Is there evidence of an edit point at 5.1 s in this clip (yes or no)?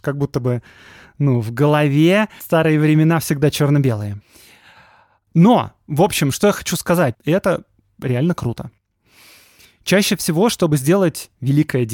no